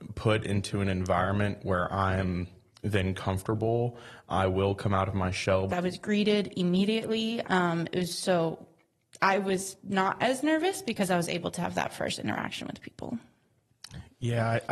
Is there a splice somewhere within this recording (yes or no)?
yes